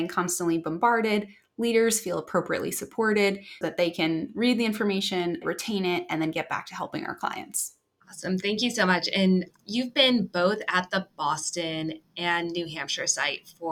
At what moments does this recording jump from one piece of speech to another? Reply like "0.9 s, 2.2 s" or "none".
3.6 s, 5.4 s